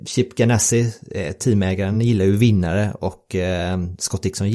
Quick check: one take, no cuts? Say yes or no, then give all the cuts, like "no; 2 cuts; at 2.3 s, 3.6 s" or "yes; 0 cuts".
yes; 0 cuts